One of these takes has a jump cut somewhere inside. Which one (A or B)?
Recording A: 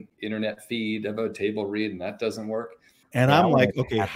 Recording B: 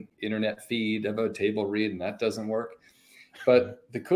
A